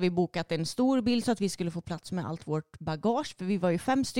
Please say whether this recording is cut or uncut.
uncut